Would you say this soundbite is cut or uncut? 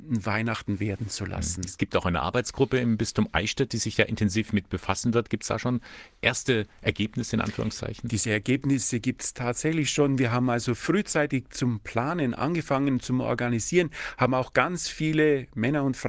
uncut